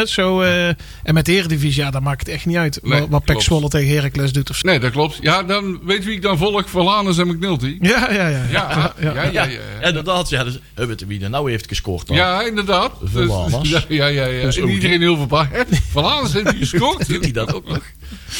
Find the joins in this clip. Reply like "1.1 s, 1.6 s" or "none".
4.6 s